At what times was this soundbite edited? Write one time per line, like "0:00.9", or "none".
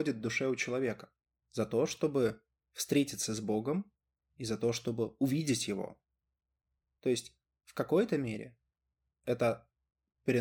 0:01.4